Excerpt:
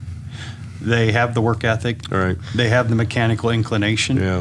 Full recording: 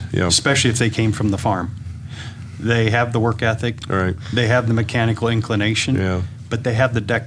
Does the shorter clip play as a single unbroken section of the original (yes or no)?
yes